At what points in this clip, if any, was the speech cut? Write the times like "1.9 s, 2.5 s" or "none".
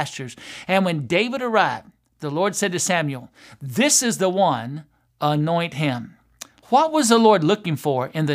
6.6 s